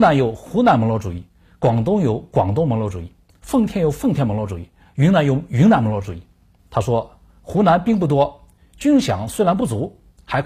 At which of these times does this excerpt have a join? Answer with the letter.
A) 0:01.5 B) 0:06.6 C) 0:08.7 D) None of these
B